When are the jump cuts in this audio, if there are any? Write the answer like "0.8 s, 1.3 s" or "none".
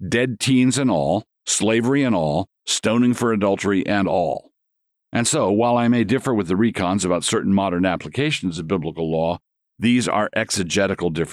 none